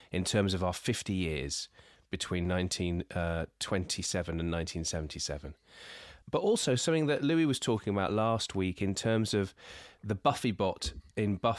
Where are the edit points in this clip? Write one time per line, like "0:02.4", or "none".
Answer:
none